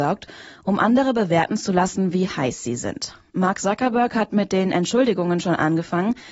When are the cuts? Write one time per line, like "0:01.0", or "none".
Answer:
0:03.3